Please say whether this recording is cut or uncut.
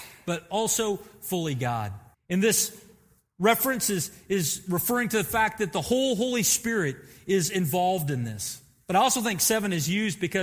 cut